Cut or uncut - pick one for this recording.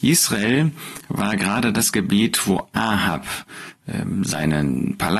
uncut